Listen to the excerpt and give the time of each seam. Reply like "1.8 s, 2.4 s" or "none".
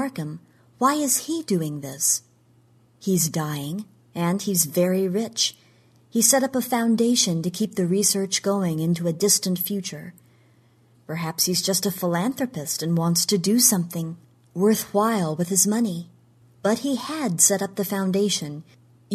16.4 s